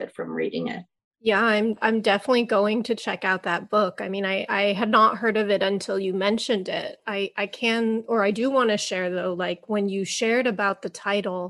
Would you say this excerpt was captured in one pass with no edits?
yes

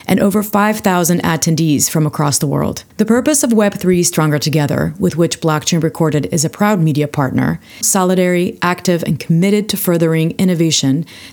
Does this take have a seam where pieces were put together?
yes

